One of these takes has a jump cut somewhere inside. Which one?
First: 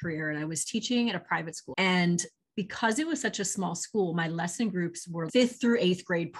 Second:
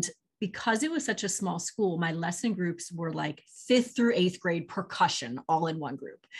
first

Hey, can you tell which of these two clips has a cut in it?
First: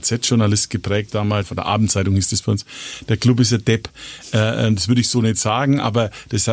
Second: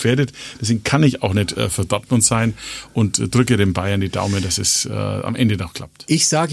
first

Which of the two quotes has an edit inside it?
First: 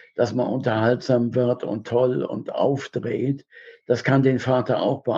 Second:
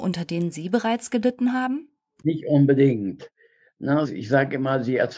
second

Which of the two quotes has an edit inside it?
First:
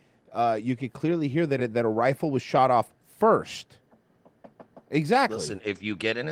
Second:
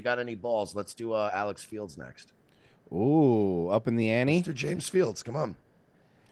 first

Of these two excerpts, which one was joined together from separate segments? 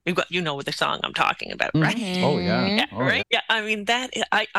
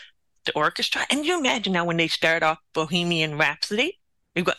first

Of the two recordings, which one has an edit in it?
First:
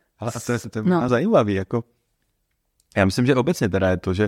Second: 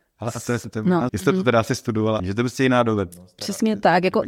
second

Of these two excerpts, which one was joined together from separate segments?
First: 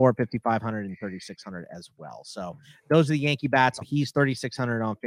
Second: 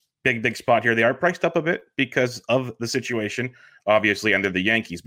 first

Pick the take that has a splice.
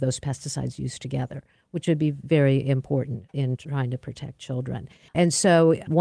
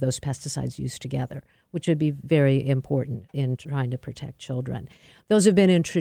first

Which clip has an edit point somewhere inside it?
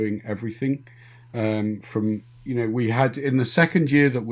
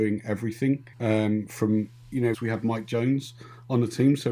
second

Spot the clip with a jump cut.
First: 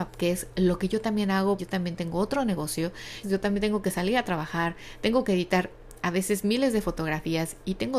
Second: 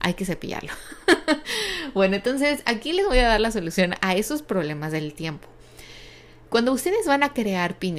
first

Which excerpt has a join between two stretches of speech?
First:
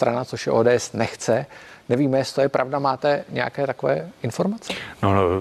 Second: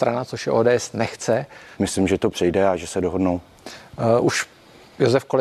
second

